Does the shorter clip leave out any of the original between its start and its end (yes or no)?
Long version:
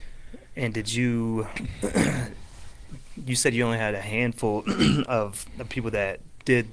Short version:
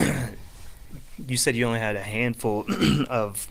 no